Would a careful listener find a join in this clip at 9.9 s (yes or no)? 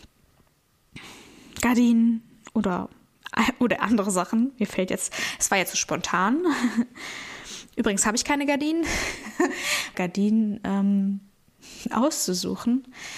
yes